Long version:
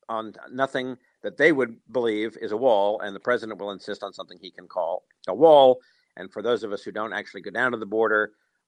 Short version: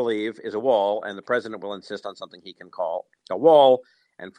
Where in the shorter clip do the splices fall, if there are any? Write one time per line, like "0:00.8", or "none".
none